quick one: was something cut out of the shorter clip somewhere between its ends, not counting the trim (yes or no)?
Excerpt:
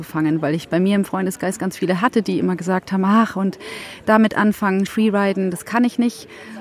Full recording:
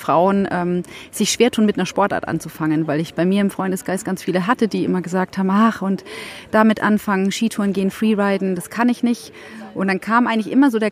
yes